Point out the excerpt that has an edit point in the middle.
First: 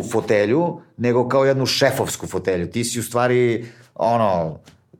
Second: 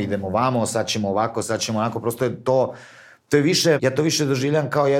second; 1 cut; at 3.8 s

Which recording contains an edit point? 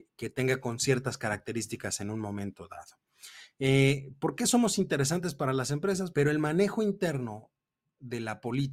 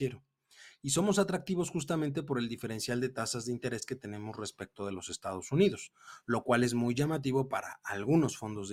first; 1 cut; at 6.1 s

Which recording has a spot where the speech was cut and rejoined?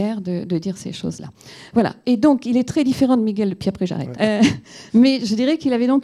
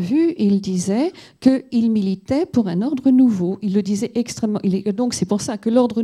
first; 1 cut; at 4.1 s

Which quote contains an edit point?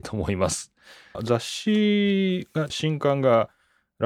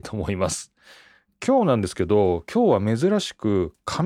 first; 2 cuts; at 1.1 s, 2.7 s

